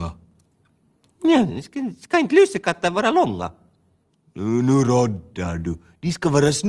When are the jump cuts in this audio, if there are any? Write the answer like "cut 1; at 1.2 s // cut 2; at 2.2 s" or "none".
none